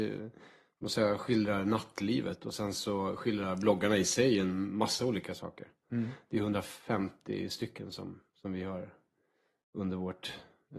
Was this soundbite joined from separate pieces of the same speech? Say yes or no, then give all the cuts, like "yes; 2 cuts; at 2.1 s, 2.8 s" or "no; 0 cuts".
no; 0 cuts